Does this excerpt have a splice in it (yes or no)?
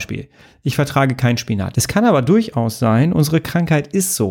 yes